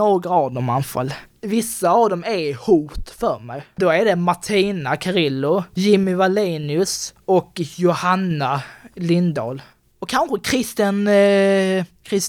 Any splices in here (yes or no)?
no